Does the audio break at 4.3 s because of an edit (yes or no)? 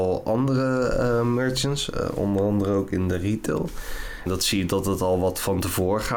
yes